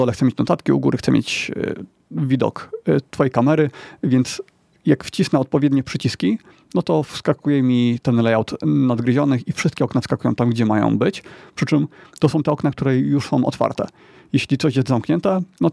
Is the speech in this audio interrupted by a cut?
no; 0 cuts

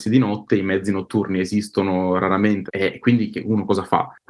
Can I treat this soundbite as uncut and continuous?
no; 1 cut; at 2.7 s

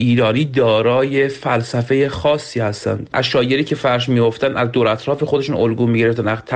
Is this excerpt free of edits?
no; 1 cut; at 3.1 s

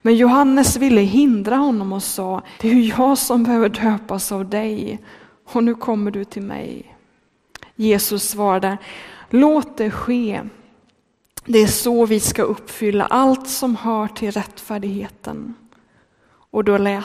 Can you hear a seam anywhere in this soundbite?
yes; 1 cut; at 2.6 s

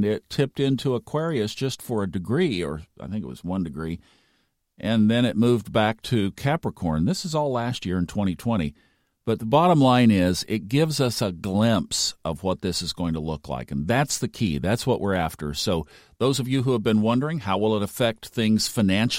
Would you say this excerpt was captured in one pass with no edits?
yes; 0 cuts

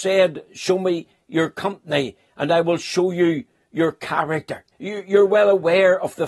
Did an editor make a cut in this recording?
yes; 1 cut; at 4.7 s

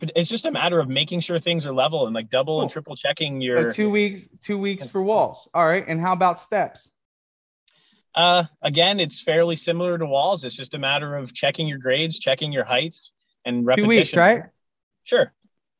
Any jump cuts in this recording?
no; 0 cuts

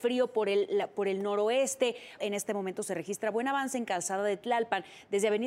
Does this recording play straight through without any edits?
no; 1 cut; at 2.2 s

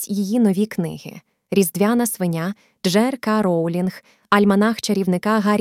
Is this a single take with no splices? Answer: yes; 0 cuts

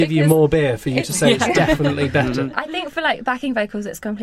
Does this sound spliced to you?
no; 0 cuts

